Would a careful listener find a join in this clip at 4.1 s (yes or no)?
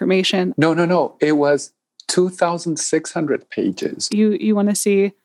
yes